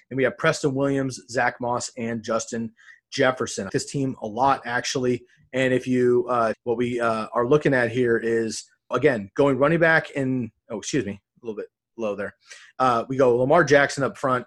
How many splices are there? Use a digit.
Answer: 3